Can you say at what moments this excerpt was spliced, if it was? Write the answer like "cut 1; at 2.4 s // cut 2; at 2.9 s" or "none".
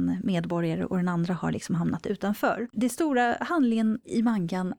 cut 1; at 2.7 s